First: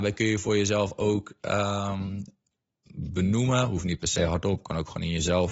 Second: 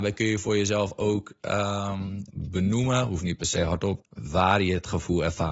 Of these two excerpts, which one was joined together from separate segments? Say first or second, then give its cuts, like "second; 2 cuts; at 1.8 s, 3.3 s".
second; 2 cuts; at 2.3 s, 4.0 s